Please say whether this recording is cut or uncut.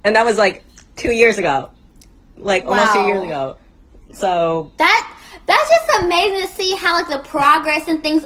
cut